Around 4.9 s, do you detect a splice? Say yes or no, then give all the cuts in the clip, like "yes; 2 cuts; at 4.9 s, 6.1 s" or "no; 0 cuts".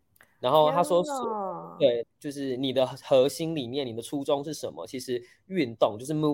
no; 1 cut; at 2.0 s